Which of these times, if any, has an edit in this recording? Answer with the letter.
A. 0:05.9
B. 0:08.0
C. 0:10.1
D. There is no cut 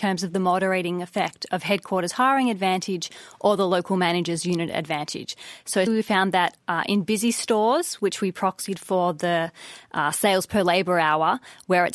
A